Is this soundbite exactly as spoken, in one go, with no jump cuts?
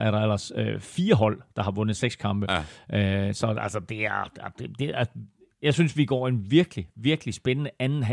yes; 0 cuts

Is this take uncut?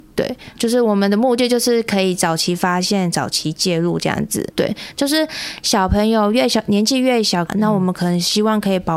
no; 2 cuts; at 4.5 s, 7.5 s

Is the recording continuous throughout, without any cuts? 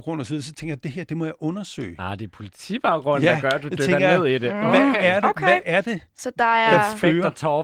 yes; 0 cuts

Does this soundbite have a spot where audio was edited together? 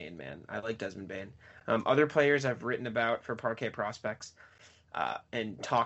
no; 0 cuts

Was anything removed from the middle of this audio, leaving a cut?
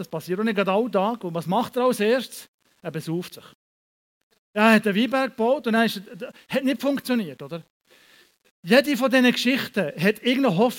no; 0 cuts

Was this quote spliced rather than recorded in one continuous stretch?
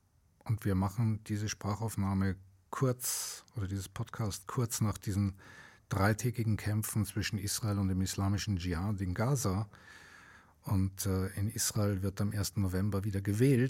no; 0 cuts

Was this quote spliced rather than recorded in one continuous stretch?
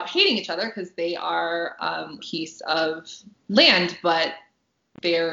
yes; 1 cut; at 2.2 s

